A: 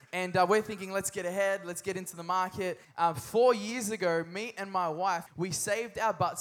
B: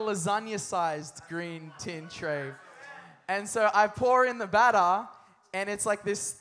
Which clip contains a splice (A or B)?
A